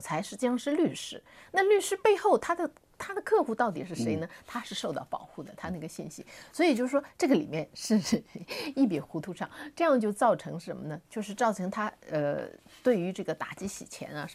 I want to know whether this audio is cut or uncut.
uncut